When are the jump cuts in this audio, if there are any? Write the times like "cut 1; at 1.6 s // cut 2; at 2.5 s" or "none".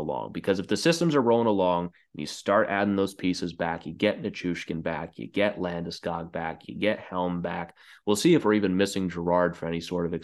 cut 1; at 6.6 s